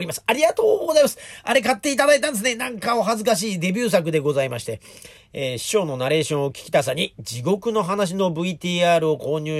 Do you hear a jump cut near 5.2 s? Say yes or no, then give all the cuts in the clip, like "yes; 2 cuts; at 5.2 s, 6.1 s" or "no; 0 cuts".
yes; 1 cut; at 5.2 s